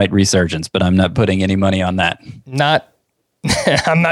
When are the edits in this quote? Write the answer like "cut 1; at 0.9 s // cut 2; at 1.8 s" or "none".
none

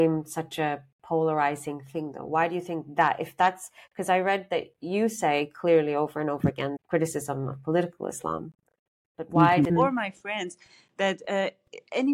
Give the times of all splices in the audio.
cut 1; at 6.8 s // cut 2; at 9.7 s

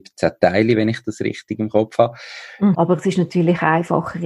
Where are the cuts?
cut 1; at 2.7 s

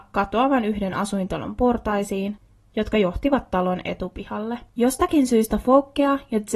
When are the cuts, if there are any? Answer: cut 1; at 4.7 s

